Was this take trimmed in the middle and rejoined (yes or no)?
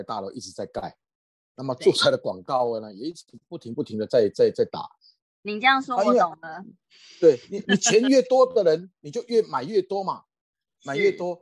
yes